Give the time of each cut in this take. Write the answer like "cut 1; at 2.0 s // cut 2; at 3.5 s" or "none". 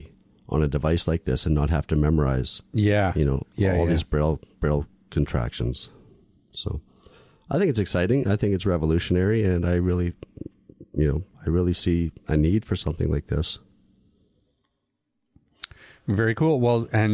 none